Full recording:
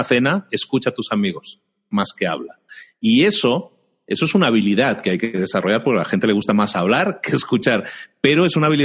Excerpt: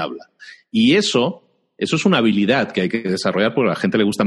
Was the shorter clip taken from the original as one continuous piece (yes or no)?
yes